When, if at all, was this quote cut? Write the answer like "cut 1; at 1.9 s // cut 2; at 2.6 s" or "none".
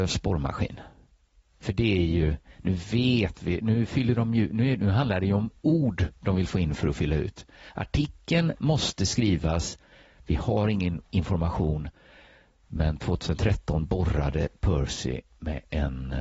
none